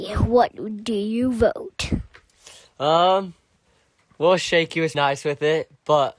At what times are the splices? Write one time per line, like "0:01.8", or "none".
0:04.9

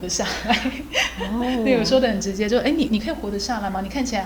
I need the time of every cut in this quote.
0:02.9

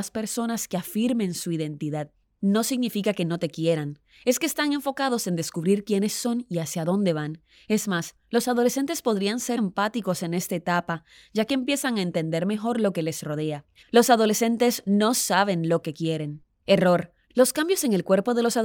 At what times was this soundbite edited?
0:09.6
0:13.8
0:17.3

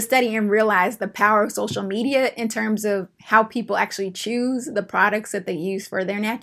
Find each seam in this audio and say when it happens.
none

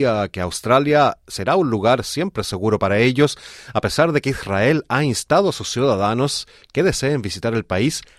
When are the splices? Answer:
none

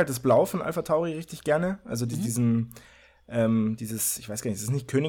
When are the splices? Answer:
none

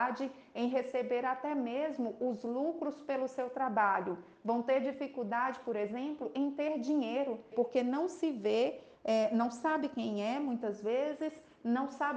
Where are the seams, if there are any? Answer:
0:07.5

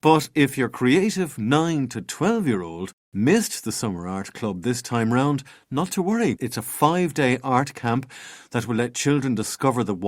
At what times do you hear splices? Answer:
0:06.4

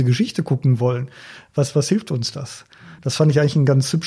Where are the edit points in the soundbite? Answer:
none

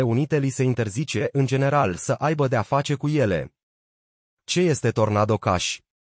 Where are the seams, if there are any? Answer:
none

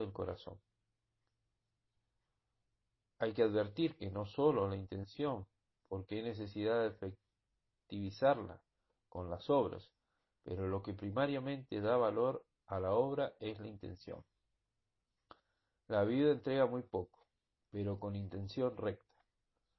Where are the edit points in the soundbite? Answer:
none

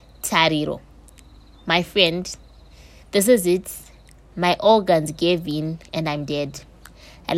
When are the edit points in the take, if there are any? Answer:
none

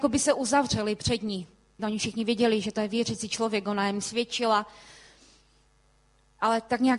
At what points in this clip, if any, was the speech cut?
0:01.8

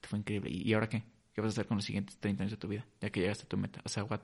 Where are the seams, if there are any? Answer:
none

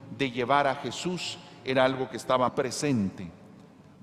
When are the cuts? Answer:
0:02.5

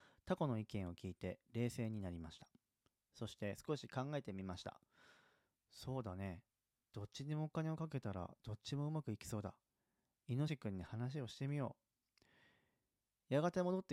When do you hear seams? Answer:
0:10.5

